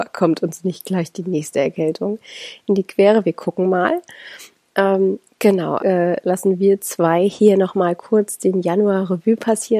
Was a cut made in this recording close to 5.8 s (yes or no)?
yes